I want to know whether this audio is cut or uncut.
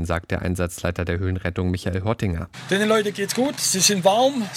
uncut